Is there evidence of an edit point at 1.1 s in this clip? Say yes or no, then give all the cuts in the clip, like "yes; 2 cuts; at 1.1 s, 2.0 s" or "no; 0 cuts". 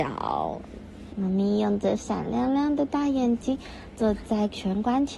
yes; 1 cut; at 1.1 s